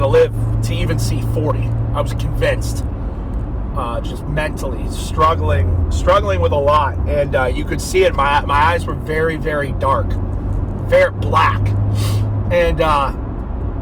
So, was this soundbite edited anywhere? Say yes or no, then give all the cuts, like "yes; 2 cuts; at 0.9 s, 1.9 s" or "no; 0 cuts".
yes; 1 cut; at 3.7 s